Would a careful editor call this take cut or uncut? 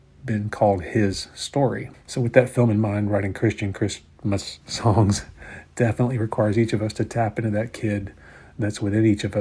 cut